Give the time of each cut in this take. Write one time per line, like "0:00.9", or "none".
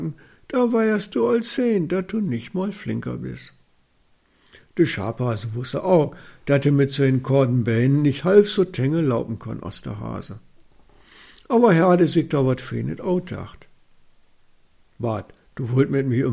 none